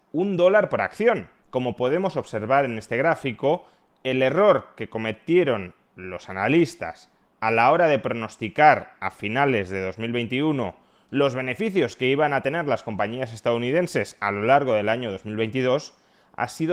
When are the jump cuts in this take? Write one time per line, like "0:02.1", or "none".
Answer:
0:01.4